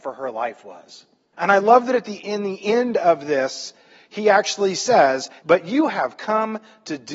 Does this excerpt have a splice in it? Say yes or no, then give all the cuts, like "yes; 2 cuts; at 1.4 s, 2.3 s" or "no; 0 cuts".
yes; 2 cuts; at 1.3 s, 5.4 s